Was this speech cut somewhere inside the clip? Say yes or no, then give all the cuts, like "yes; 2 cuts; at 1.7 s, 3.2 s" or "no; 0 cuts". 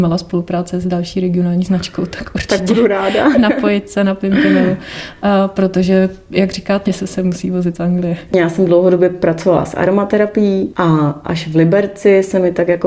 yes; 3 cuts; at 3.3 s, 6.8 s, 8.3 s